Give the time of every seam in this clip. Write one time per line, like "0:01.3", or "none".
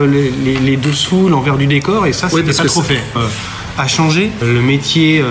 0:03.2